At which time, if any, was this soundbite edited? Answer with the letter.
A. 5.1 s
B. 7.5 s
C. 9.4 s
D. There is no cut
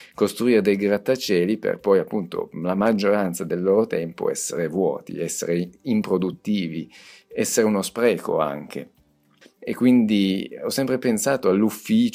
C